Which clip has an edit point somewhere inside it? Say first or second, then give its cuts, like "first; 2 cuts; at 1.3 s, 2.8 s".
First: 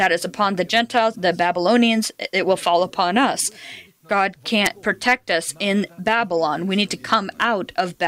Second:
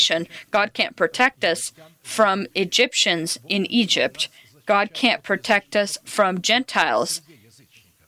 first; 2 cuts; at 1.1 s, 3.9 s